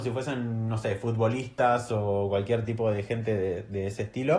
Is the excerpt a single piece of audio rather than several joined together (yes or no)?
yes